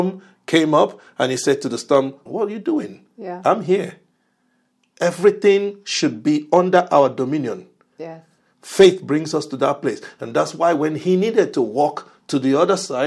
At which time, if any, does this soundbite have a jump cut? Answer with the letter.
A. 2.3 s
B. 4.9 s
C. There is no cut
A